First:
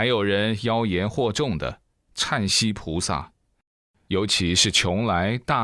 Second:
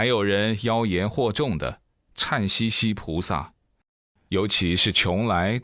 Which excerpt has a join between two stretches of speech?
first; 1 cut; at 2.5 s

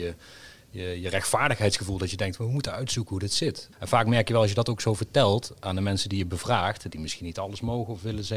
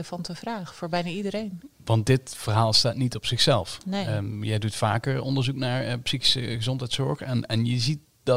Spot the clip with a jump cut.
first; 1 cut; at 3.7 s

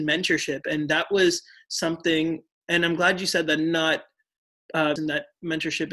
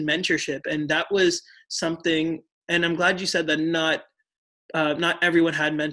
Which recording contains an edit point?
first; 1 cut; at 5.0 s

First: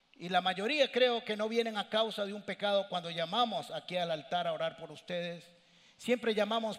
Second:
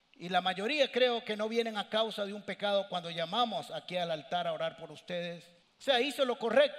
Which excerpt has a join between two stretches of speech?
second; 1 cut; at 5.6 s

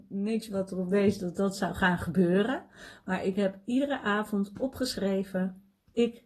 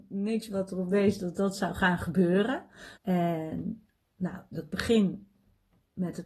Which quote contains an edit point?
second; 1 cut; at 3.0 s

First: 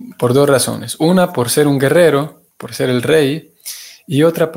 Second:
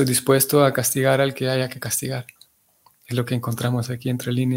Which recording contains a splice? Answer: first; 1 cut; at 2.5 s

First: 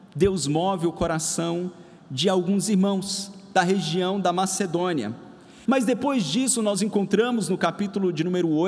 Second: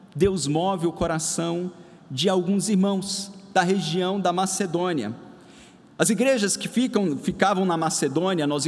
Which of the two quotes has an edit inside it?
first; 1 cut; at 5.7 s

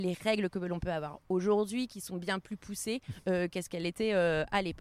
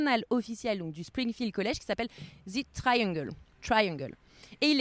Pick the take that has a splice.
second; 1 cut; at 3.5 s

